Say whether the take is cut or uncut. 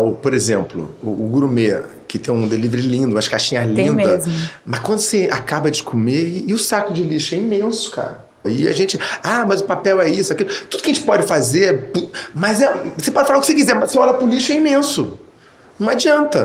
cut